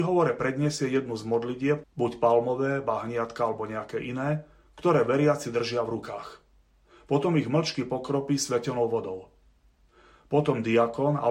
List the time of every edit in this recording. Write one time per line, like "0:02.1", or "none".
0:01.8